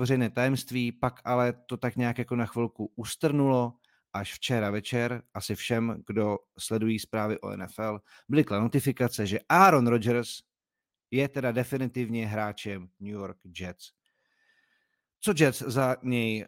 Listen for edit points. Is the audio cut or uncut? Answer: uncut